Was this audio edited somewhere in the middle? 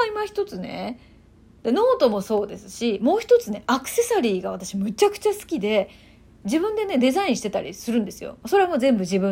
yes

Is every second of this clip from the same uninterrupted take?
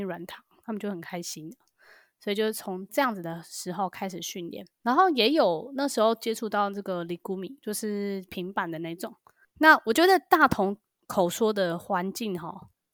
no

